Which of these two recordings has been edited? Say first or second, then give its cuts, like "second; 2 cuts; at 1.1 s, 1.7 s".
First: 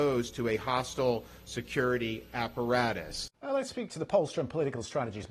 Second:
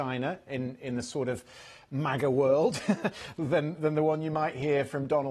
first; 1 cut; at 3.3 s